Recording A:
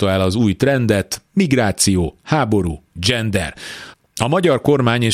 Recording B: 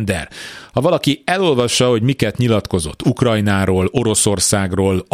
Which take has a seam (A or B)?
A